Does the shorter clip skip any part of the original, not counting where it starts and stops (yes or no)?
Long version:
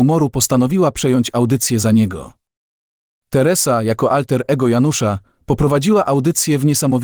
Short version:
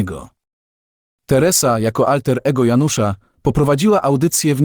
no